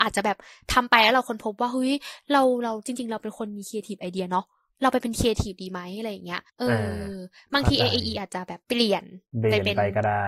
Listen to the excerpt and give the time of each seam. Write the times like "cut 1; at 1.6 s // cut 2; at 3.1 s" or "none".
cut 1; at 6.5 s // cut 2; at 8.6 s